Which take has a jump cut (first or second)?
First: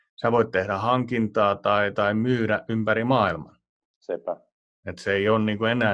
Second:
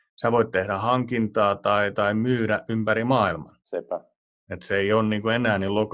second